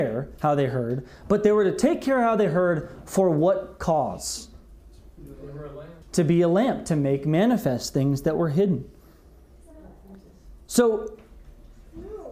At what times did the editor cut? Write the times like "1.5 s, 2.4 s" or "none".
6.0 s